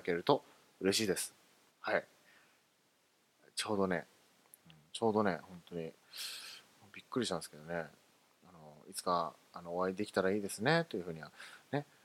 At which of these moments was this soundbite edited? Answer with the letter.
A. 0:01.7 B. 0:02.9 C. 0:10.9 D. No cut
A